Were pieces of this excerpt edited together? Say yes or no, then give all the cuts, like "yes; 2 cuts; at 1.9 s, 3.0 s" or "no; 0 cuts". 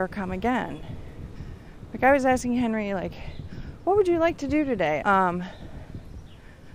yes; 1 cut; at 5.0 s